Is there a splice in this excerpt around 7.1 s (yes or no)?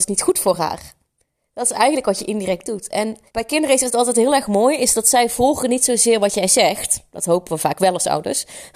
no